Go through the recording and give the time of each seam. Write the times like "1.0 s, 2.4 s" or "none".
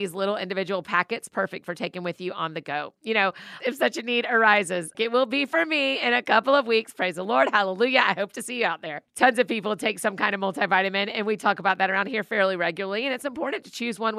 3.6 s, 4.9 s